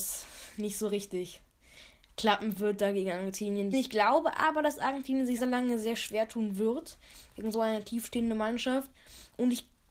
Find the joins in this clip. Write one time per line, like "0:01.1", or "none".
0:03.7
0:05.4